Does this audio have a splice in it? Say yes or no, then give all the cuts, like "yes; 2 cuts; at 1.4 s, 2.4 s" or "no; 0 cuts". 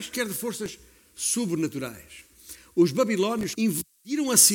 yes; 1 cut; at 3.5 s